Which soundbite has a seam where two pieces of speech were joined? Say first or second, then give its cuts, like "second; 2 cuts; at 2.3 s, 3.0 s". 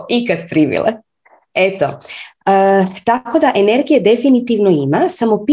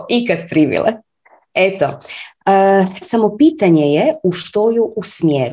second; 1 cut; at 3.0 s